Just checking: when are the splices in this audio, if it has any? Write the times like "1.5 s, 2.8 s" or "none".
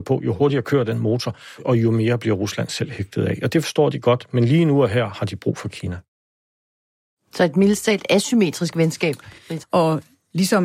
9.6 s